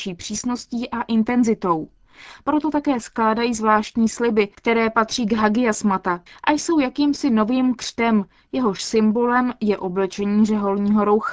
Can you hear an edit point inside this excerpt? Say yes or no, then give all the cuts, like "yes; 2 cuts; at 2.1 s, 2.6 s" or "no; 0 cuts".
yes; 1 cut; at 6.3 s